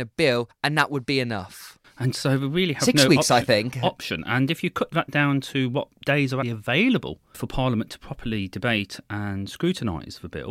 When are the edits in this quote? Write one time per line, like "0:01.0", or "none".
0:01.8
0:06.4